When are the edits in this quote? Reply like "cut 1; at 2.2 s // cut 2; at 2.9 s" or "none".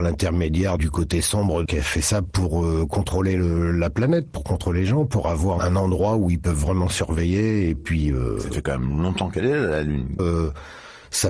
cut 1; at 10.2 s